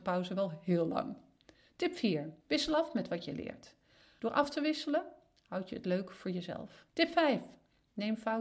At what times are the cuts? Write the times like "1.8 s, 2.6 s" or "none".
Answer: 2.4 s, 4.2 s, 6.9 s